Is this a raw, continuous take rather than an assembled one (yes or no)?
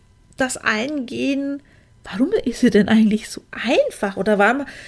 yes